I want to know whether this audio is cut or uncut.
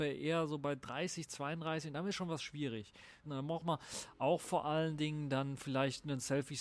cut